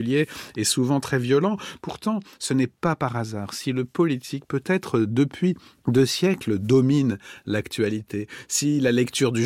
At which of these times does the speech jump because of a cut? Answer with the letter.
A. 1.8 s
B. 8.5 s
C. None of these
A